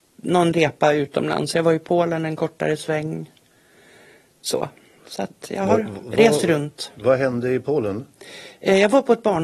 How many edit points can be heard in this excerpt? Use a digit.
0